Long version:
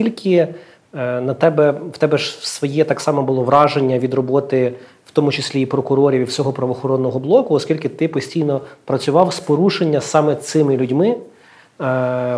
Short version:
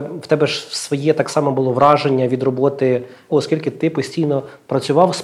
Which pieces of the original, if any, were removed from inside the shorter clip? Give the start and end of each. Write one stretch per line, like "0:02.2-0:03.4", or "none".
0:05.0-0:07.5